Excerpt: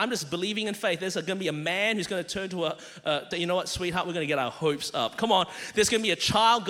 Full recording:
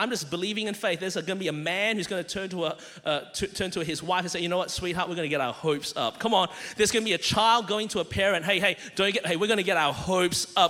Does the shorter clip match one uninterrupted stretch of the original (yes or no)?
no